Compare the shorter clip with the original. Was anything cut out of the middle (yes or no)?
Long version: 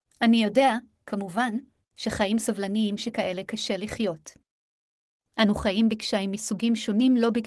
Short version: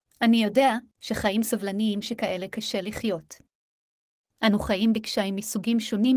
yes